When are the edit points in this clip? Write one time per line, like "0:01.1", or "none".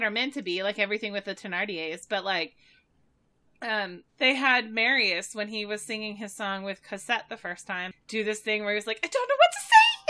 0:04.1
0:07.9